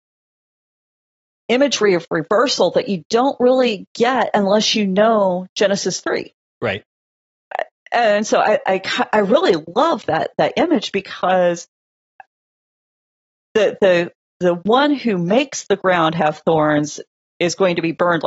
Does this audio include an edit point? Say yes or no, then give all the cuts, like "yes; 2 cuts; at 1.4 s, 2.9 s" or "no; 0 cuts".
no; 0 cuts